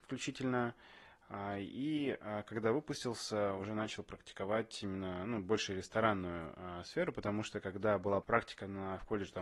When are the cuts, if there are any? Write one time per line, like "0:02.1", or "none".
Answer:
0:08.2